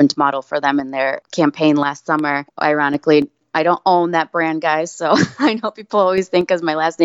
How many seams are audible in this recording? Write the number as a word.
one